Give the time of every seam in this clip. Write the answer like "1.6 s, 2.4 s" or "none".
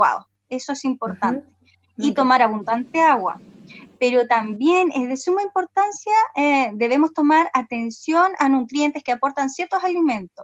none